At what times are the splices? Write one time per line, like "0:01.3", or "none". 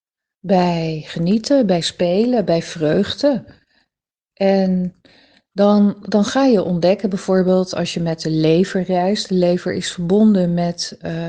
0:04.3